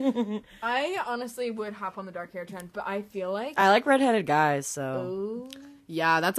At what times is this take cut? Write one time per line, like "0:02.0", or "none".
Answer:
none